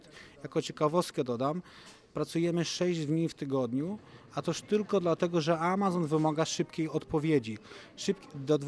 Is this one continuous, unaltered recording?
yes; 0 cuts

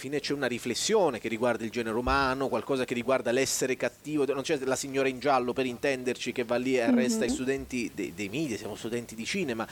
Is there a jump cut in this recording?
yes; 1 cut; at 7.3 s

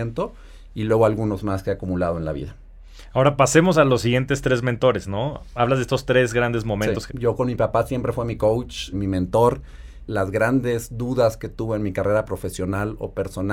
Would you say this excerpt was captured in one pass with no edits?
no; 3 cuts; at 7.1 s, 8.9 s, 10.1 s

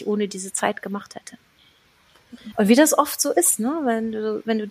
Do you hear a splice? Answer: yes; 1 cut; at 2.5 s

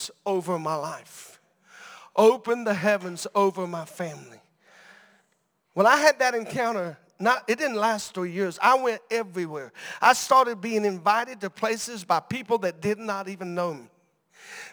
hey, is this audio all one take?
yes; 0 cuts

